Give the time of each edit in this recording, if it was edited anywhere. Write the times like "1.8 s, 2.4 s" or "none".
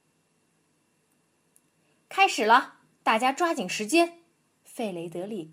4.6 s